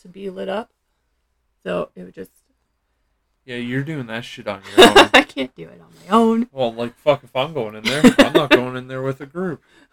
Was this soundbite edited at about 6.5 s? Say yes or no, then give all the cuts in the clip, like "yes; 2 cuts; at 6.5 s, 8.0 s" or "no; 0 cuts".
no; 1 cut; at 2.7 s